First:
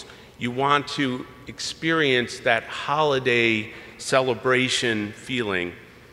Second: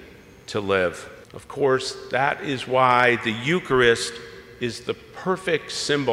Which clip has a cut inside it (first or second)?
second